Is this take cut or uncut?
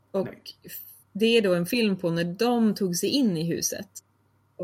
uncut